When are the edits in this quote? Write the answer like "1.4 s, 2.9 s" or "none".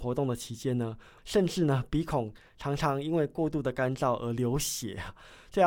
1.2 s

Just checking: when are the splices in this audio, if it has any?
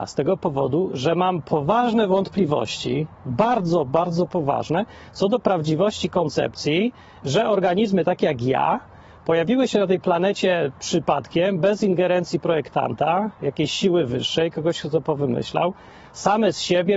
none

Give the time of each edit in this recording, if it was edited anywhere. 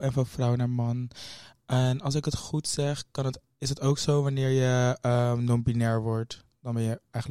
none

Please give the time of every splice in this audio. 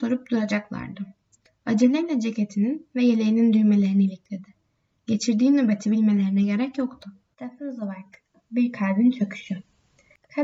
7.3 s

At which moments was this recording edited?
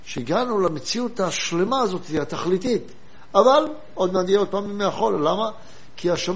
none

